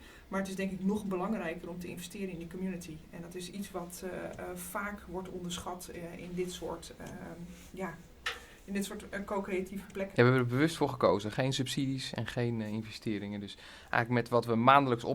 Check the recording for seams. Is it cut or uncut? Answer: cut